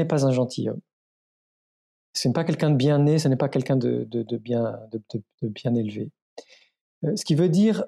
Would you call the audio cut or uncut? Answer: uncut